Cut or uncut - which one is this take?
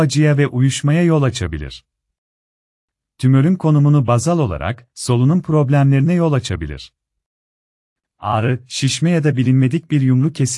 cut